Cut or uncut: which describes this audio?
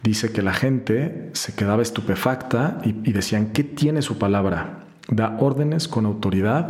uncut